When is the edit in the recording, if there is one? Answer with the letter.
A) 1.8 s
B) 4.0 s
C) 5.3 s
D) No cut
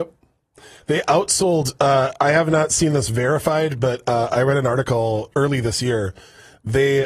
C